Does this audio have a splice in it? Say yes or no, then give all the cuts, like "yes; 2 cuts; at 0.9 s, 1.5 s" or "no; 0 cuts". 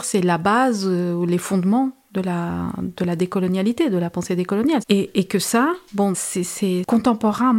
yes; 2 cuts; at 4.8 s, 6.1 s